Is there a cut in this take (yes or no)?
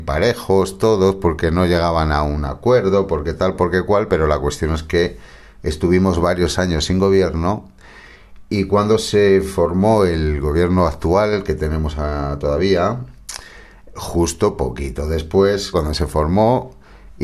yes